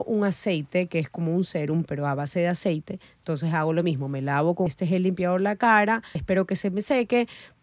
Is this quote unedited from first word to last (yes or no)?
no